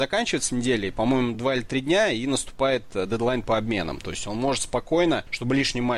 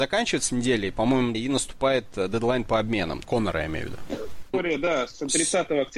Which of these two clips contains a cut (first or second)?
second